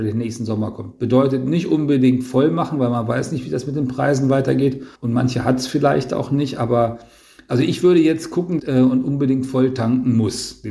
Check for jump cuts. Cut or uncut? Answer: cut